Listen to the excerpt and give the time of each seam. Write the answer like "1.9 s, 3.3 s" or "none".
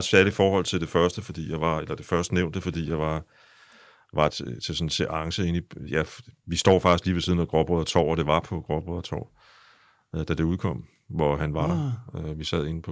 4.3 s